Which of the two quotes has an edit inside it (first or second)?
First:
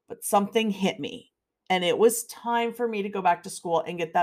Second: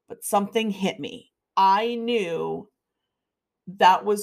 second